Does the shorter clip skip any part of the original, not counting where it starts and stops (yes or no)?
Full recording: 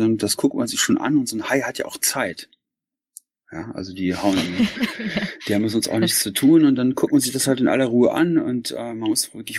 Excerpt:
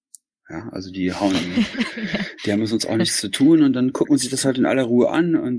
no